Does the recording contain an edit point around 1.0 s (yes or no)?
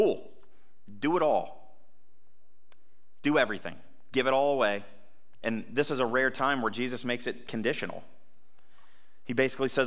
no